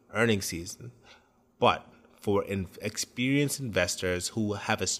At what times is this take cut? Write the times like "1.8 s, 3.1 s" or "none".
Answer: none